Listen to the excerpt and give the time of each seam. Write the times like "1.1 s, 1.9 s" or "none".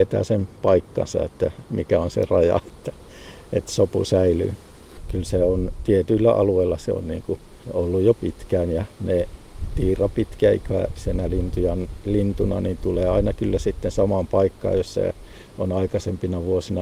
none

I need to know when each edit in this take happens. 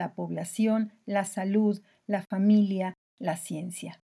1.0 s, 3.1 s

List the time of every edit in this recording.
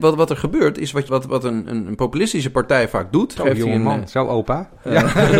1.1 s, 3.4 s

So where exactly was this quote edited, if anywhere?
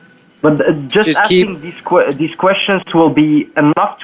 none

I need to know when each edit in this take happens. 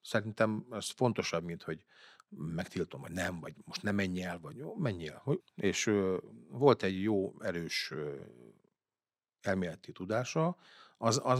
5.4 s

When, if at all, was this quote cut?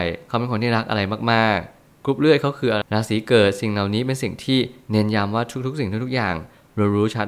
2.8 s

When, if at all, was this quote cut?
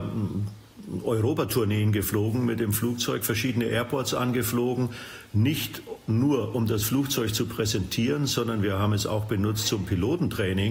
none

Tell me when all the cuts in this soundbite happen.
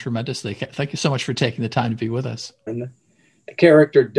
2.7 s

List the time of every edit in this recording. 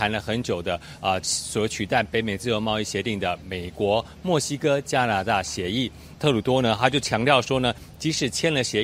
6.1 s

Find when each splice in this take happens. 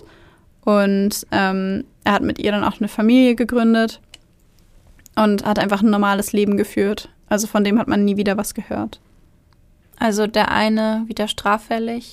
none

